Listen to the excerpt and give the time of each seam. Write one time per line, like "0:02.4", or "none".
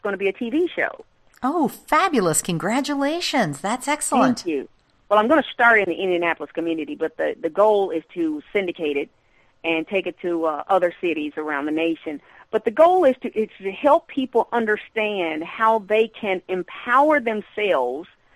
0:05.1